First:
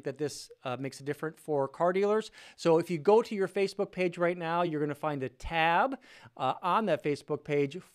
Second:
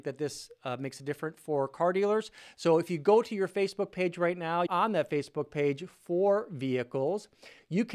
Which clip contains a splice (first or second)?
second